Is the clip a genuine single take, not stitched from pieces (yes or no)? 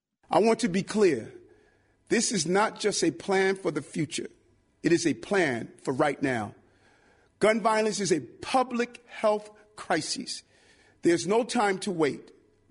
yes